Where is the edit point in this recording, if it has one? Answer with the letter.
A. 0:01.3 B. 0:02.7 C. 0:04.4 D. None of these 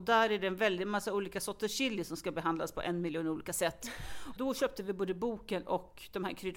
C